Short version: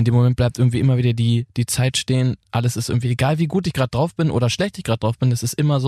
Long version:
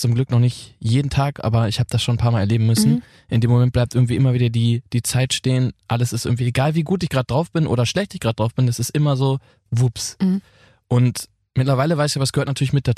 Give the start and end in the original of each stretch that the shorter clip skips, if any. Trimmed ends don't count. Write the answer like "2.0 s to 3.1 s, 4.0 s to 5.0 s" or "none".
none